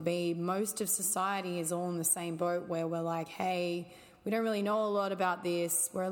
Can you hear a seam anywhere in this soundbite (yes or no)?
no